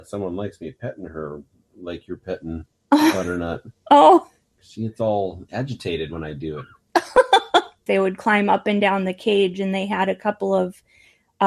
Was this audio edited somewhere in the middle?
yes; 1 cut; at 7.9 s

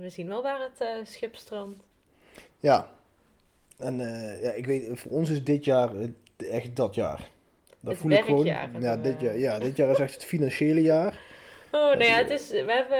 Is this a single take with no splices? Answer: yes; 0 cuts

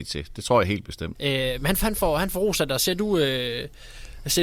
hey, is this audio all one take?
no; 1 cut; at 1.2 s

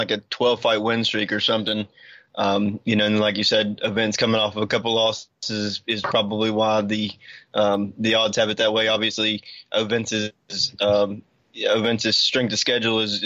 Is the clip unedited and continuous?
yes; 0 cuts

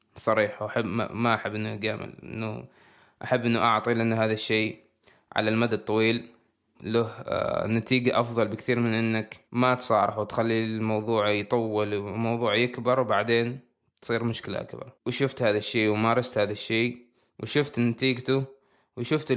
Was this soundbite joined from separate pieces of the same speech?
yes; 3 cuts; at 6.8 s, 9.5 s, 15.0 s

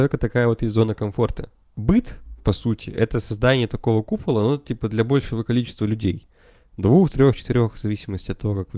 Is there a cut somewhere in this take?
no; 0 cuts

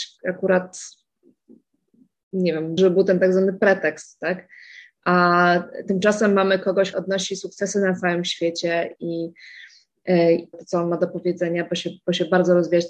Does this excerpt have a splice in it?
yes; 3 cuts; at 2.8 s, 6.9 s, 10.5 s

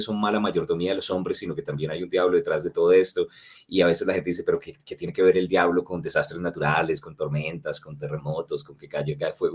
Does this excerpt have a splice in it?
no; 0 cuts

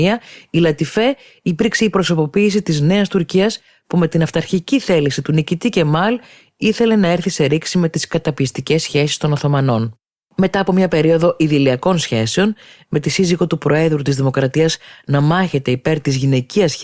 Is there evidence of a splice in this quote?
no; 0 cuts

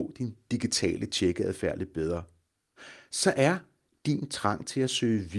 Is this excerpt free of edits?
yes; 0 cuts

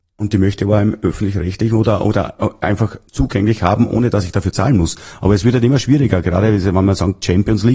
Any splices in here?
yes; 1 cut; at 3.1 s

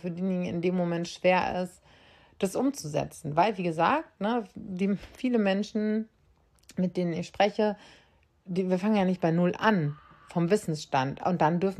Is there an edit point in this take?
no; 0 cuts

